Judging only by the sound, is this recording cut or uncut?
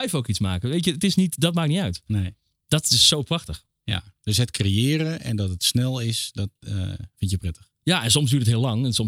uncut